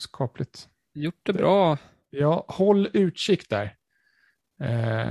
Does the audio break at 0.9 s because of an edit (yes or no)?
yes